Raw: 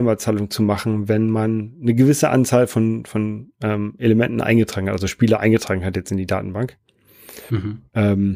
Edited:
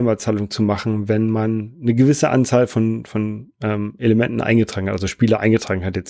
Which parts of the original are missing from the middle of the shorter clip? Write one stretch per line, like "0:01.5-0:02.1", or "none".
none